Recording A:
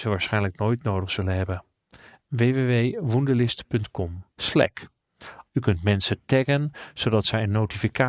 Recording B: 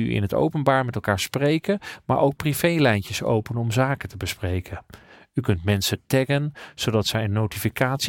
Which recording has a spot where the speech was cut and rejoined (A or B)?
A